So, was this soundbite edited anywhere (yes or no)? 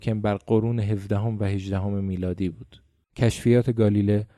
yes